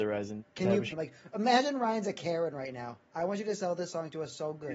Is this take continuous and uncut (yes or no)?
no